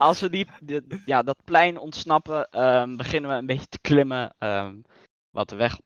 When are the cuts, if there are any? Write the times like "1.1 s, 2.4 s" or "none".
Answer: none

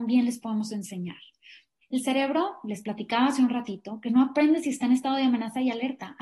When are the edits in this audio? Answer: 1.8 s

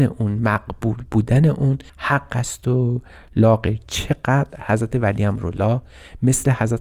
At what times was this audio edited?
1.9 s

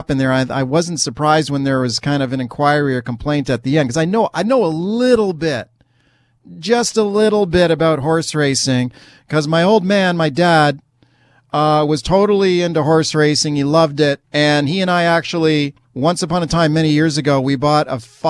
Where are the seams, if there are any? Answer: 14.2 s, 15.8 s

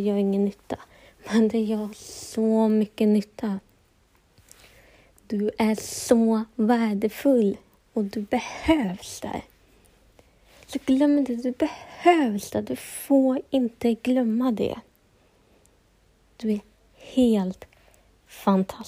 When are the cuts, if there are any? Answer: none

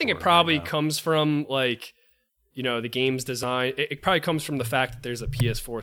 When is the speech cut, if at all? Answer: none

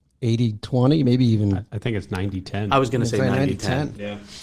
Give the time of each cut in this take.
none

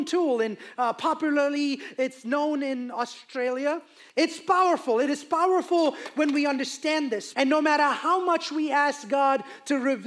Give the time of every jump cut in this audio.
4.1 s, 7.3 s

